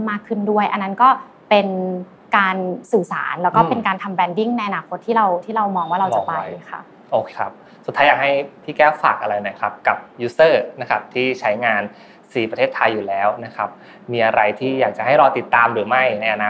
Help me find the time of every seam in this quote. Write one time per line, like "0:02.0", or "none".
0:07.3